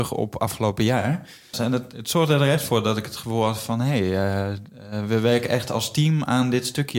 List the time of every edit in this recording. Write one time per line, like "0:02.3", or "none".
0:01.5